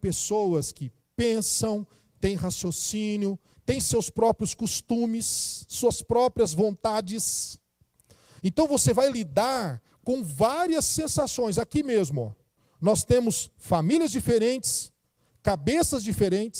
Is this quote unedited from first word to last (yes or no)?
no